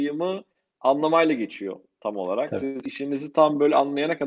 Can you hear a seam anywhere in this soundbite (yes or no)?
no